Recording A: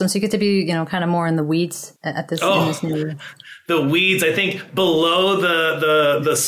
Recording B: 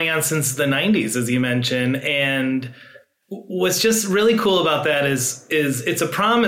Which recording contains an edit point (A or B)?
A